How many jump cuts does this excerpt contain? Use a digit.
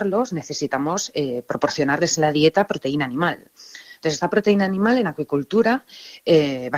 0